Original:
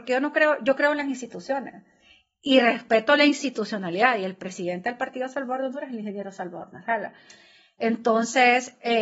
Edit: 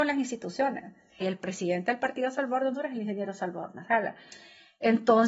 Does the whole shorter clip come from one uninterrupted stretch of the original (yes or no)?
no